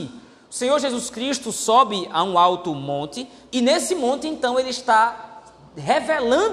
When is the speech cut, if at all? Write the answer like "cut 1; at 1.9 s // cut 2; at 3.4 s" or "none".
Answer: none